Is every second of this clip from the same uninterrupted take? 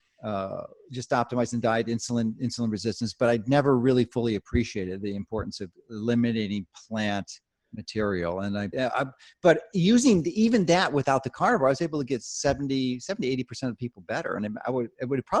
no; 1 cut; at 8.7 s

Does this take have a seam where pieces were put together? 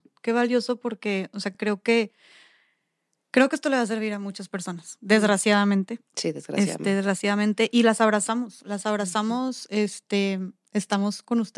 no; 0 cuts

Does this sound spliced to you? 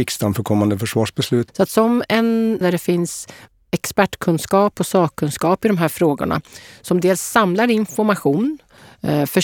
yes; 2 cuts; at 1.5 s, 2.6 s

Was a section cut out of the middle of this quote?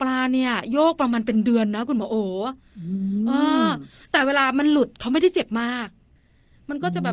no; 0 cuts

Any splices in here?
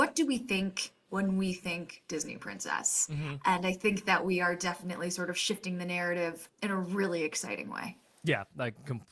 no; 0 cuts

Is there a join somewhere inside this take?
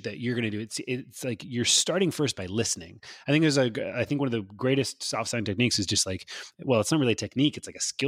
no; 0 cuts

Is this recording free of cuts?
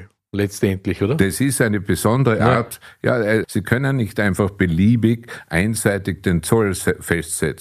no; 1 cut; at 3.4 s

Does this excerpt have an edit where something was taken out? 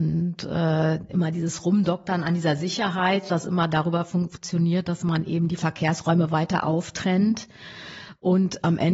no; 0 cuts

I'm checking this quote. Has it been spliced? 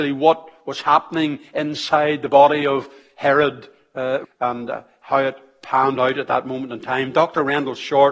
yes; 1 cut; at 4.2 s

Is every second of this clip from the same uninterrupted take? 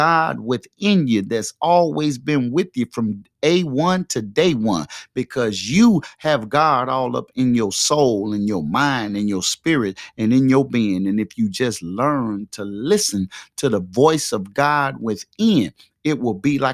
yes; 0 cuts

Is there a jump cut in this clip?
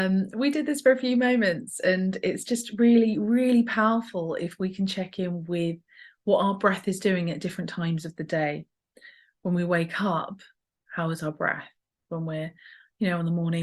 no; 0 cuts

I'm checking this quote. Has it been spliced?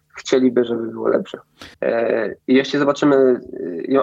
yes; 1 cut; at 1.7 s

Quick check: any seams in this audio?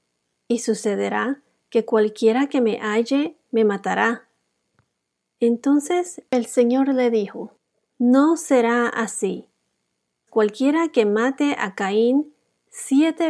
yes; 1 cut; at 10.3 s

